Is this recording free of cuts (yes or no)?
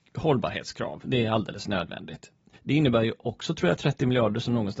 no